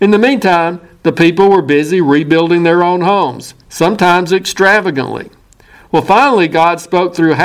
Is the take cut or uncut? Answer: uncut